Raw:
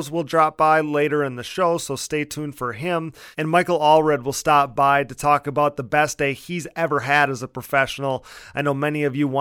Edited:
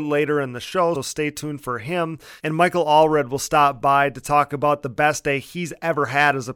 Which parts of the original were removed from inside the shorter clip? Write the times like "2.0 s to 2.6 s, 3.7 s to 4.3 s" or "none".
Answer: 1.8 s to 1.9 s

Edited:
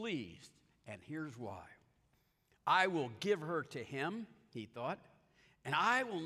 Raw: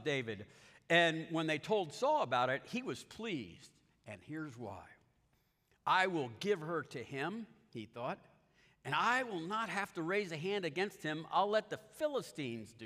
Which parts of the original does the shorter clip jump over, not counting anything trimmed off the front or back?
none

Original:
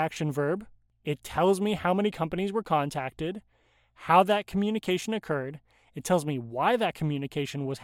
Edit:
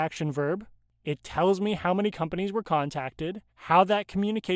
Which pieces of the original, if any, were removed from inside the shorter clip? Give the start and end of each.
3.5 s to 3.9 s

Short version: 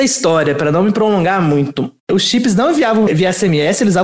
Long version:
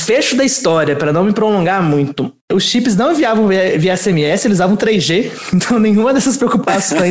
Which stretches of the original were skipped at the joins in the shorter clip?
3.5 s to 3.7 s

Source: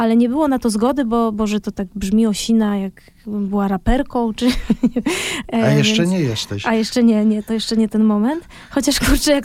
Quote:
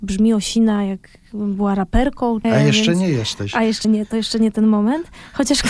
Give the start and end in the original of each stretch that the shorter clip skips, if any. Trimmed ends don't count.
4.4 s to 5.6 s, 7.0 s to 7.2 s

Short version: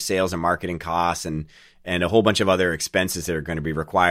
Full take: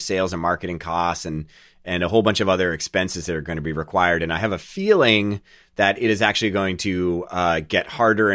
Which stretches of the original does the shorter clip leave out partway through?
none

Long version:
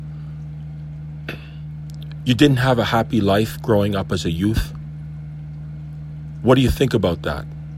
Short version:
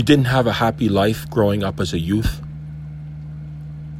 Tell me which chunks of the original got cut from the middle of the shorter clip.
none

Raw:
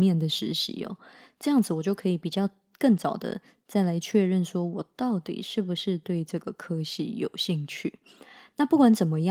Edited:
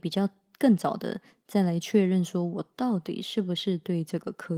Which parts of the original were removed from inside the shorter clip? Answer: none

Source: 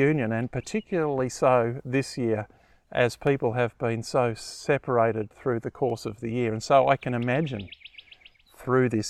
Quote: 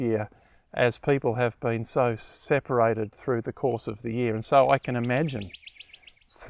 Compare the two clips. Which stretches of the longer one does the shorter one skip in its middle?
none

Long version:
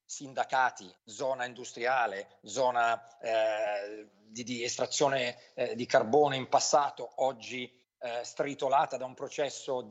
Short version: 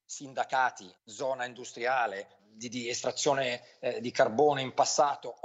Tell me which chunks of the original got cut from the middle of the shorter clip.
2.4 s to 4.1 s

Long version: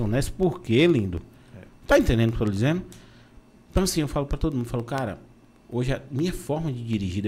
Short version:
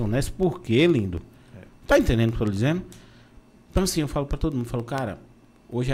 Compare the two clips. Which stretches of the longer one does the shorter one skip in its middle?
none

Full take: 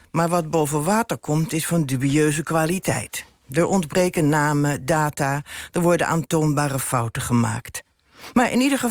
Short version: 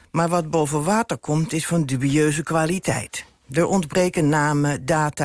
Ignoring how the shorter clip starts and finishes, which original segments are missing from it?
none

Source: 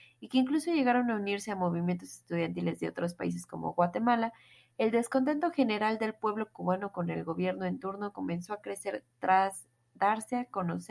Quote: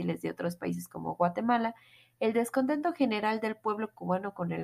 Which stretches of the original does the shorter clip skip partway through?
none

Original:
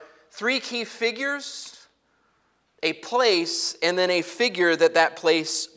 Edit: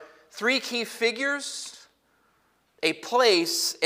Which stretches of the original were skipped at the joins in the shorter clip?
none

